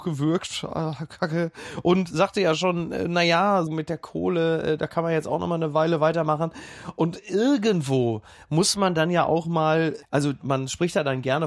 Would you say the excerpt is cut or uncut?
cut